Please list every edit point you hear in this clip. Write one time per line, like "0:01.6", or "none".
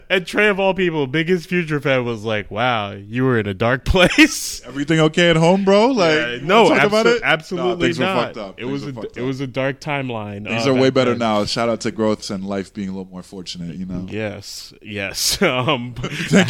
0:12.2